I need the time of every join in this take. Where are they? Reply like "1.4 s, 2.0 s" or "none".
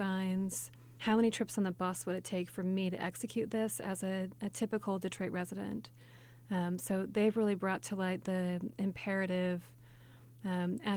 1.0 s